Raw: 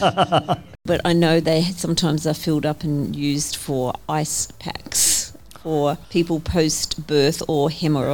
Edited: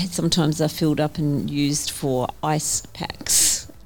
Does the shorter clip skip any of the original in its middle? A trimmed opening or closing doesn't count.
no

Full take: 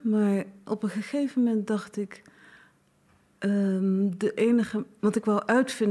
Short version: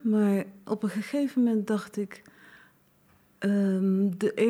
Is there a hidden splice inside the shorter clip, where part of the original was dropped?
no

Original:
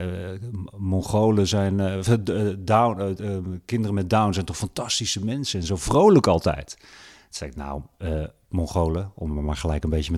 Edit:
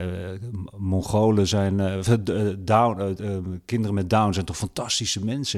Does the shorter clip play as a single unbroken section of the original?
yes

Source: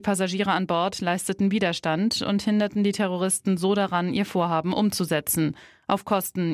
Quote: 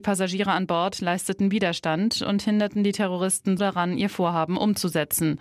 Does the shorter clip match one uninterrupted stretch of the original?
no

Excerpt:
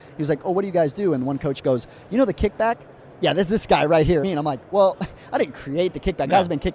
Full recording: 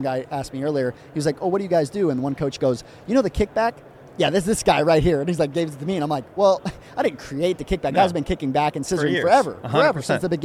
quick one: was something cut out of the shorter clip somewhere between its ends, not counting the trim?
yes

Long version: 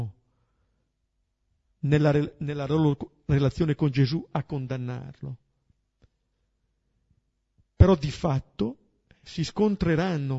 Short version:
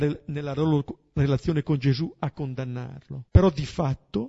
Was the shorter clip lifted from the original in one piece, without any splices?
no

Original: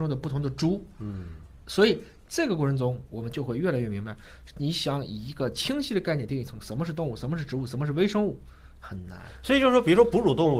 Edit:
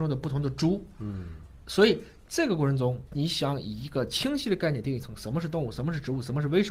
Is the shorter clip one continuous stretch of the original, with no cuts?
no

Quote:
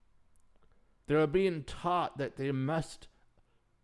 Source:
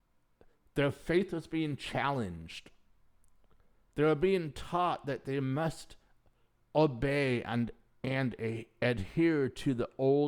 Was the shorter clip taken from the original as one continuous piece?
yes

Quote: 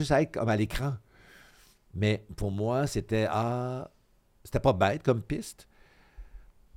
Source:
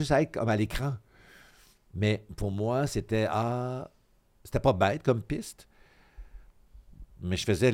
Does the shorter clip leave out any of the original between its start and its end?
no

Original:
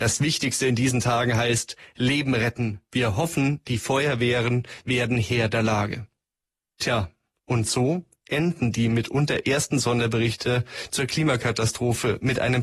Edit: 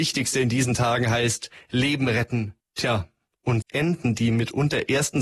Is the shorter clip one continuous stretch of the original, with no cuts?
no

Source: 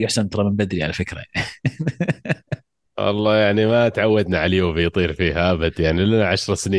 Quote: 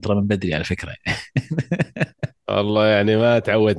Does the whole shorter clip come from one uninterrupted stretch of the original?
no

